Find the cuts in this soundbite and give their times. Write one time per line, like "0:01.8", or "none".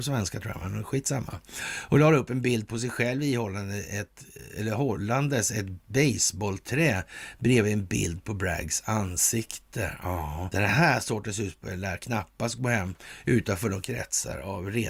0:10.5